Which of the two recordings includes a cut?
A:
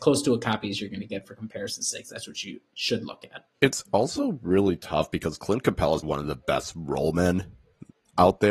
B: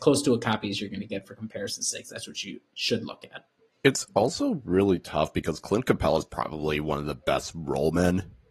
A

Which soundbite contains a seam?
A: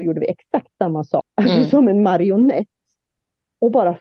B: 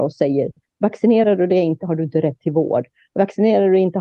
A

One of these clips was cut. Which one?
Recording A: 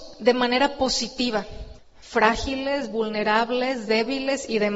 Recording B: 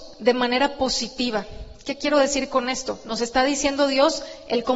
A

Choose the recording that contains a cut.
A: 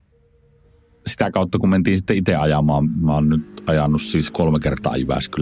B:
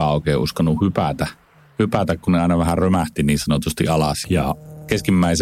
B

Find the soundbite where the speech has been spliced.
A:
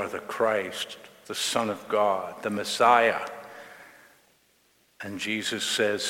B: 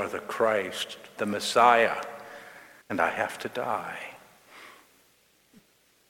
B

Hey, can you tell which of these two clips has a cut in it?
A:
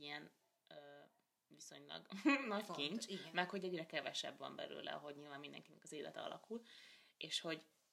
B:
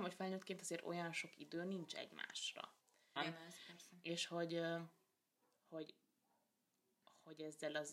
B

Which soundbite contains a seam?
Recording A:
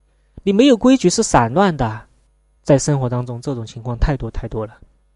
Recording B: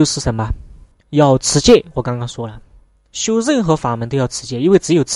A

